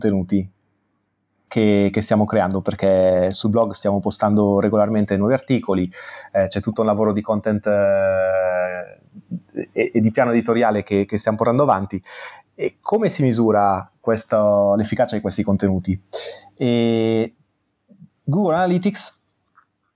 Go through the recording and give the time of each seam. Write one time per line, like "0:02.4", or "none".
none

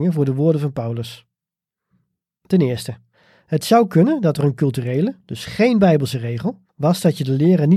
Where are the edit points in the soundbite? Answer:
0:06.7

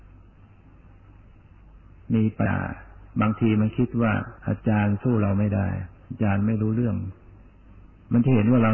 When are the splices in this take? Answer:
0:02.5
0:04.4

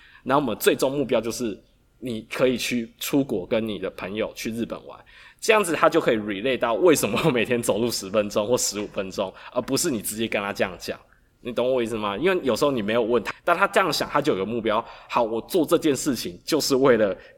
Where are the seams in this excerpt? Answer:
0:13.3

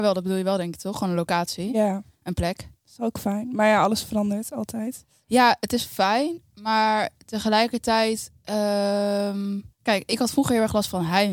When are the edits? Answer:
0:09.7

